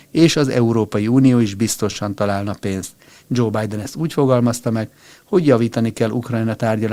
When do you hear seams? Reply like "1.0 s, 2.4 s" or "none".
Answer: 3.2 s